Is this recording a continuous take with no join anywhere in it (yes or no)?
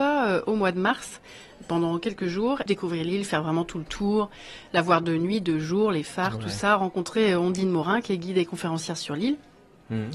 no